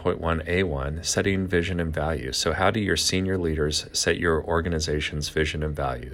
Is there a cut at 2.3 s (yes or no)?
no